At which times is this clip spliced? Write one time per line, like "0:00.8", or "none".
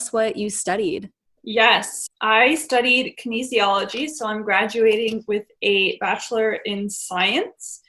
0:02.1